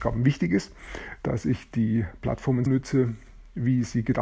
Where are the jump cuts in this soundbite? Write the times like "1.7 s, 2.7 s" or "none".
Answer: 2.7 s